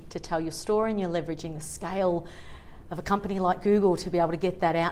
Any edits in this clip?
no; 0 cuts

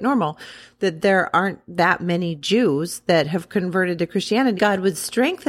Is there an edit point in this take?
yes; 1 cut; at 4.6 s

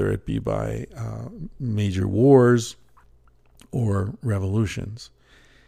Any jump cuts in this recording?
no; 0 cuts

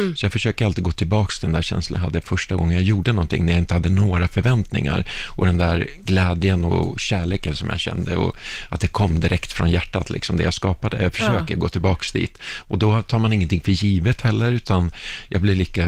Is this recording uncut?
yes; 0 cuts

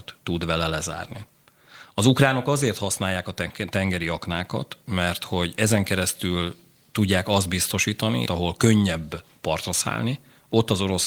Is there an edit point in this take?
yes; 1 cut; at 8.2 s

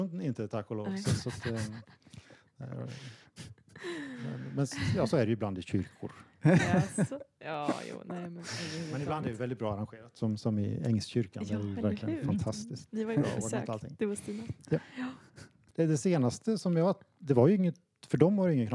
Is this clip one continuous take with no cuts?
yes; 0 cuts

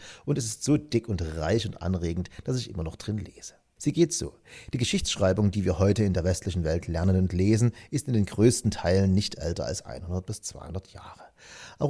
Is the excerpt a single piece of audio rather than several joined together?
no; 1 cut; at 3.8 s

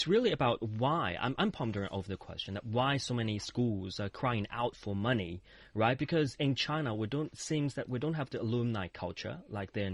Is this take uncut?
yes; 0 cuts

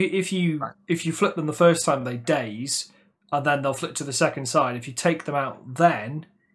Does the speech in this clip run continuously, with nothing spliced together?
yes; 0 cuts

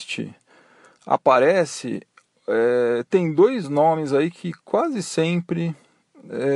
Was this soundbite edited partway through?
no; 0 cuts

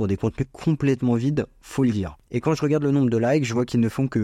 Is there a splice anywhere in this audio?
no; 0 cuts

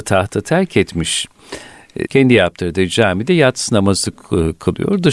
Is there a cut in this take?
yes; 1 cut; at 2.1 s

